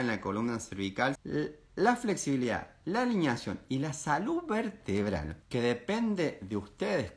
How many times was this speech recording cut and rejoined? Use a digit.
2